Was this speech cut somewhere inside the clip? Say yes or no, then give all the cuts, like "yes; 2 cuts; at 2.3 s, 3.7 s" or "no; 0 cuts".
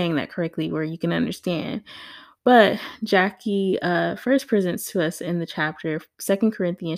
no; 0 cuts